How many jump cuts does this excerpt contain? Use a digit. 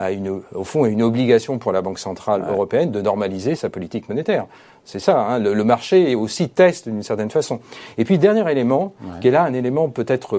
1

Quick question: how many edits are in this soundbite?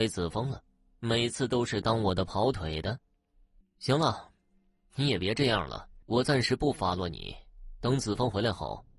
2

